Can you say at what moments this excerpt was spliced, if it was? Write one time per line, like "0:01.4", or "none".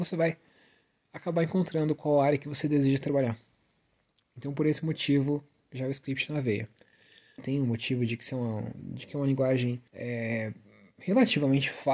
0:07.4
0:09.9

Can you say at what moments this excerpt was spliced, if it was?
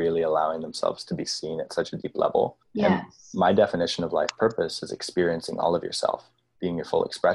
0:02.6

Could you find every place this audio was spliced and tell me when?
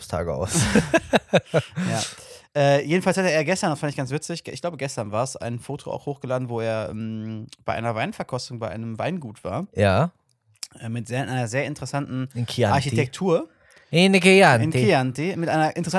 none

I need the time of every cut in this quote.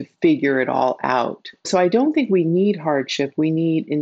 none

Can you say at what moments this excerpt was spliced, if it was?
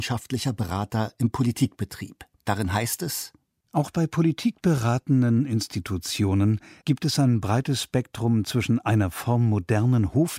0:02.3
0:06.8

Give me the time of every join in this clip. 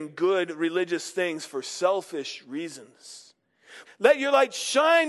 0:03.8

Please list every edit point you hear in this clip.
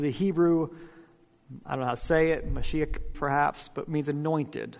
0:03.1

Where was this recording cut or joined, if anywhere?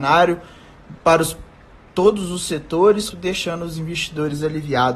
0:01.0
0:03.1

